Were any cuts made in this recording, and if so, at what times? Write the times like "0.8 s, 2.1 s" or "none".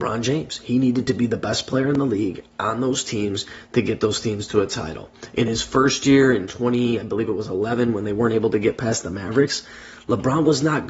none